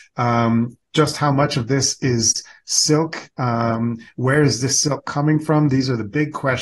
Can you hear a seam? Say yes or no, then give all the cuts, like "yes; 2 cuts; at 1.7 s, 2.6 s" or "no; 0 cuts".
no; 0 cuts